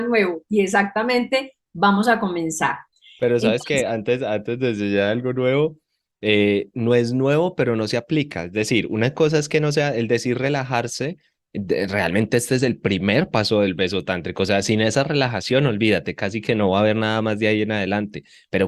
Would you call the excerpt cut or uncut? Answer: uncut